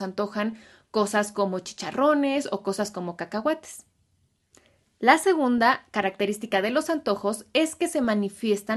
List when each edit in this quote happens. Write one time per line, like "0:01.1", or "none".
none